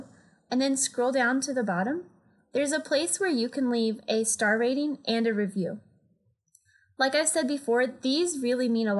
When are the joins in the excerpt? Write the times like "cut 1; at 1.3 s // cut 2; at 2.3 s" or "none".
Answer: none